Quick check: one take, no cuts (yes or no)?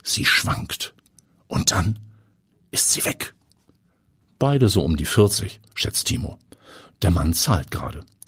no